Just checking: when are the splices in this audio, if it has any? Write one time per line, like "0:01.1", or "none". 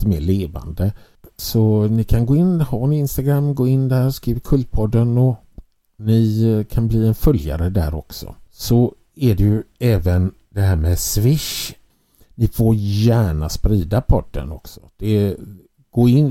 none